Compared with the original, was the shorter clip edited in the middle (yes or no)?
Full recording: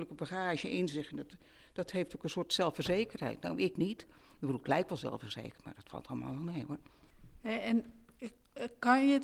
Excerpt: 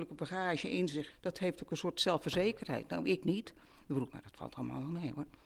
yes